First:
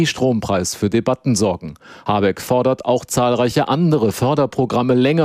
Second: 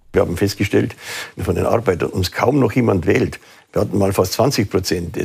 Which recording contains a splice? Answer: second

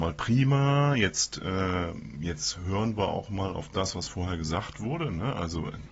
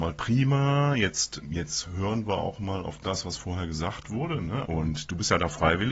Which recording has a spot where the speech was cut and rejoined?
second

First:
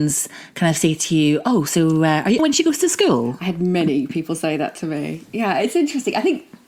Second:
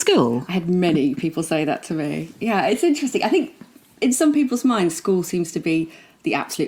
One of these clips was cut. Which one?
first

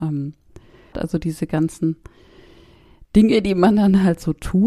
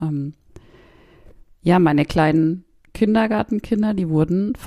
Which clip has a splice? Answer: first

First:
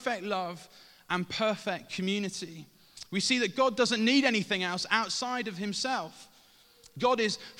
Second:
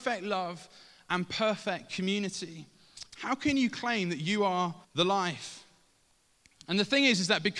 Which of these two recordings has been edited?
second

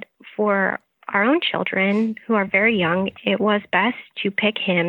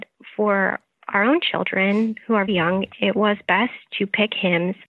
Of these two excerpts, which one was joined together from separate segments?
second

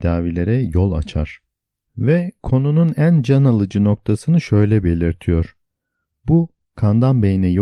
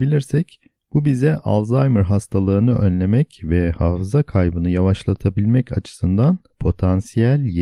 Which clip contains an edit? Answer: first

